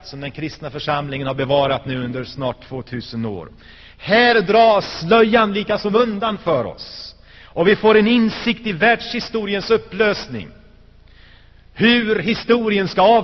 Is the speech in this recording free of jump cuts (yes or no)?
yes